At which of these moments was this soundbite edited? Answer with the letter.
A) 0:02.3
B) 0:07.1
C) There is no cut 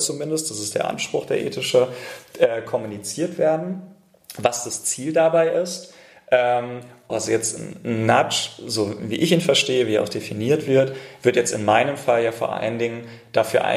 B